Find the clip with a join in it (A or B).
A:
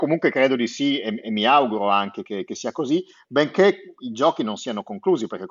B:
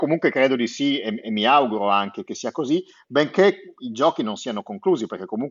B